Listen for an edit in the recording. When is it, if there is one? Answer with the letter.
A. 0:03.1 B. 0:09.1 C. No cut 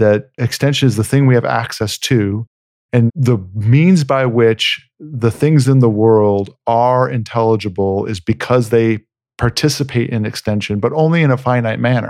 A